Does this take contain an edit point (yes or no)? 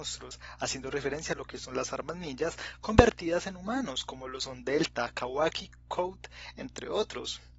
no